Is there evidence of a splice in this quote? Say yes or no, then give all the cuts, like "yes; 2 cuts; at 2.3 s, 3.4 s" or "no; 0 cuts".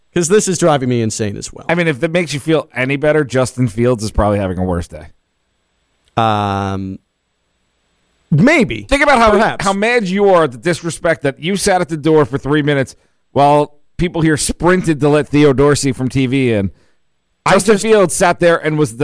yes; 1 cut; at 8.9 s